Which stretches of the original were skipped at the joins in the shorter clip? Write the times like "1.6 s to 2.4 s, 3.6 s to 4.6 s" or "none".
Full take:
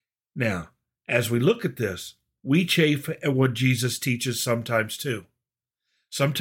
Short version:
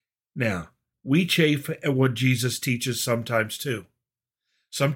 0.9 s to 2.3 s